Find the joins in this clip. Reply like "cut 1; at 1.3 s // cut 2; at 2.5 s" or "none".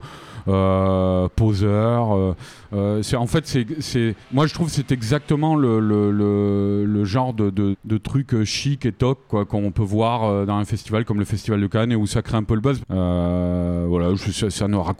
cut 1; at 4.2 s // cut 2; at 7.7 s // cut 3; at 12.8 s